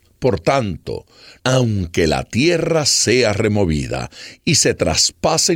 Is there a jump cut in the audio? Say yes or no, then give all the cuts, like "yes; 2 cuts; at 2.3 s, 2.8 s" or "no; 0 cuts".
yes; 1 cut; at 1.4 s